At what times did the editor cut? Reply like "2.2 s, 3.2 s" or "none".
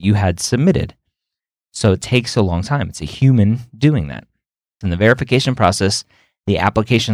4.8 s